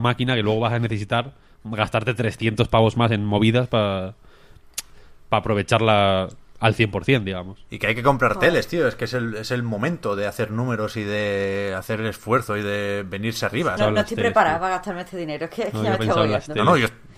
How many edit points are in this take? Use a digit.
1